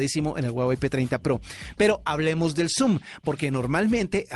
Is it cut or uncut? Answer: uncut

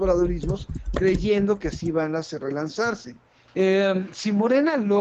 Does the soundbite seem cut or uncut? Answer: cut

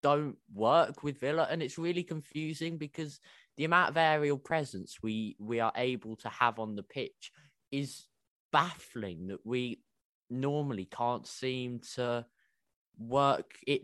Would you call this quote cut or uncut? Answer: uncut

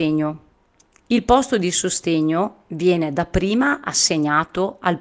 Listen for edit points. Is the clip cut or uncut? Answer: uncut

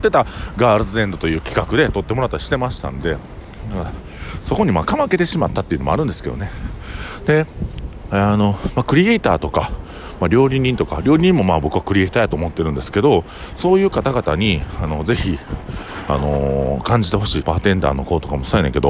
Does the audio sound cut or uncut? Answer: cut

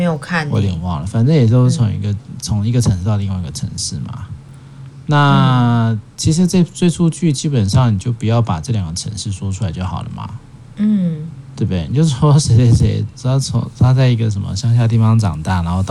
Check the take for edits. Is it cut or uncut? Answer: uncut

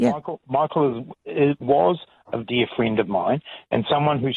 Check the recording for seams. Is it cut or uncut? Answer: cut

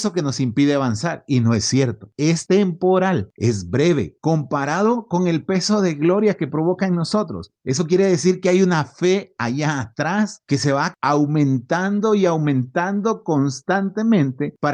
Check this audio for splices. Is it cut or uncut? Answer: uncut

